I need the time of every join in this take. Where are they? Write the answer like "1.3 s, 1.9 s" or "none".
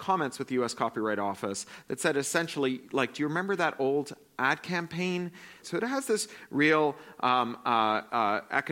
5.6 s